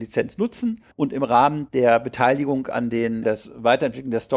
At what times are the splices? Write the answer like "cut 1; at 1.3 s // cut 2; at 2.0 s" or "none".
cut 1; at 0.9 s // cut 2; at 3.2 s